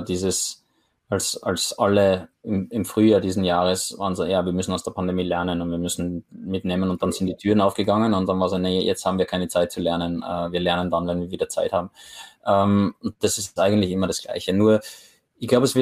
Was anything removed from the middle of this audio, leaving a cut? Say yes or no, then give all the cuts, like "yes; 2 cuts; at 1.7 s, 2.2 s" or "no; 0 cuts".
no; 0 cuts